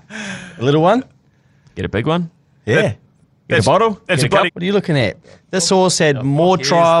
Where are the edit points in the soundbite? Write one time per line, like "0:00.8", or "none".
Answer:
0:04.5